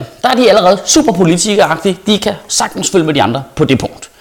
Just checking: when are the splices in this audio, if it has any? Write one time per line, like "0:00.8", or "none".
none